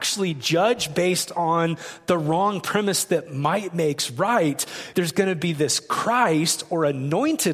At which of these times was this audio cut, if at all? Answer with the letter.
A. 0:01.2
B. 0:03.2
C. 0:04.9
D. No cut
C